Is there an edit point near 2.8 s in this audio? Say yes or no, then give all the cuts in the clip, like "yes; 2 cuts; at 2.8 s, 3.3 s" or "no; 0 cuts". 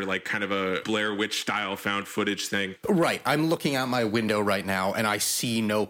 yes; 1 cut; at 2.8 s